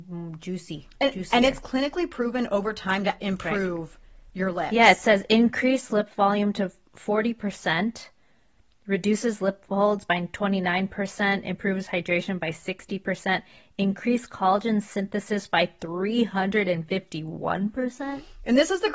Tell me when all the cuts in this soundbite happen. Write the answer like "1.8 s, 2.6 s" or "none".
3.2 s